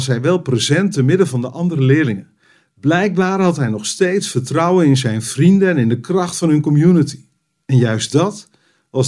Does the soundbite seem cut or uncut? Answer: uncut